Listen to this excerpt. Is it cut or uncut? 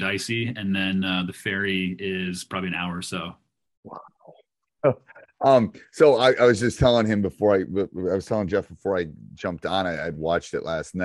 uncut